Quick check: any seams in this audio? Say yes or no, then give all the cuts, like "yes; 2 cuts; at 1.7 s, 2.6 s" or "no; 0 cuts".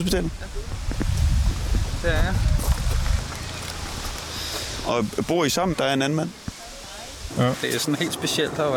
yes; 2 cuts; at 5.7 s, 7.3 s